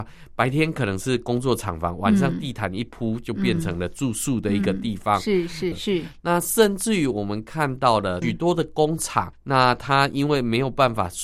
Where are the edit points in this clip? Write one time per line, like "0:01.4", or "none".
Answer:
0:05.7
0:08.2
0:09.3